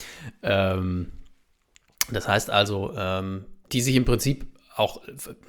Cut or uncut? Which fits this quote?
cut